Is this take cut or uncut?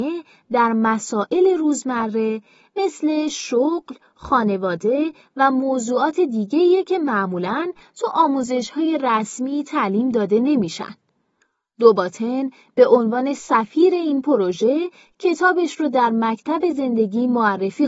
uncut